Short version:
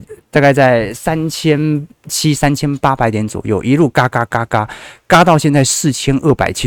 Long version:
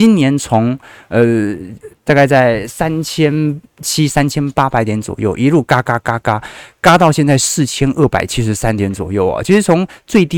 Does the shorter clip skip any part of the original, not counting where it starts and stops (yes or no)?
no